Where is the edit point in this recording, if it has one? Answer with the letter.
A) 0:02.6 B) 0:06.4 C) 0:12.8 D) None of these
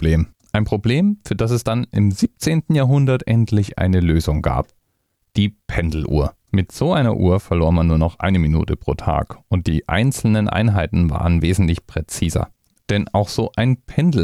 C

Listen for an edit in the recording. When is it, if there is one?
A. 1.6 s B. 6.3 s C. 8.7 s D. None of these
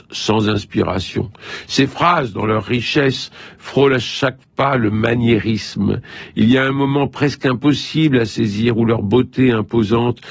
D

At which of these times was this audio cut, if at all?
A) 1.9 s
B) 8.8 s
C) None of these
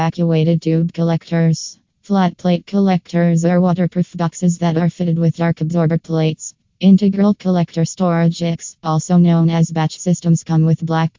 C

